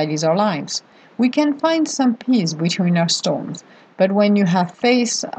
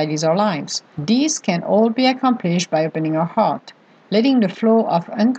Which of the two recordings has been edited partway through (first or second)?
second